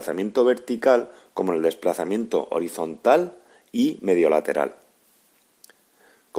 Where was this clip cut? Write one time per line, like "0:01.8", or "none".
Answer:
none